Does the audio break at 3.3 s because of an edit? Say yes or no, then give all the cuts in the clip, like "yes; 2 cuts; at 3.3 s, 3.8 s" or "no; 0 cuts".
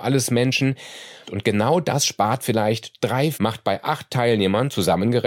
yes; 2 cuts; at 1.2 s, 3.3 s